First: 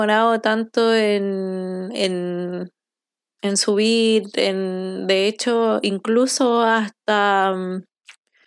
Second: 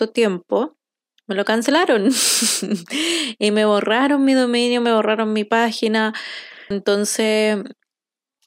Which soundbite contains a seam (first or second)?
second